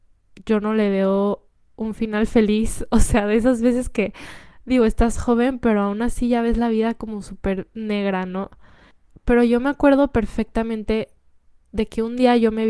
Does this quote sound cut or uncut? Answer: uncut